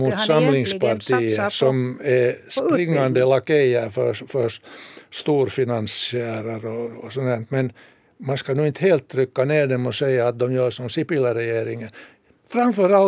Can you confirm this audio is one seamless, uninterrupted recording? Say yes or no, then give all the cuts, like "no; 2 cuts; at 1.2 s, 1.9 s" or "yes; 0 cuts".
yes; 0 cuts